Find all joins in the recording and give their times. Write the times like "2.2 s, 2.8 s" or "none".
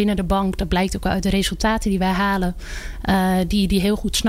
none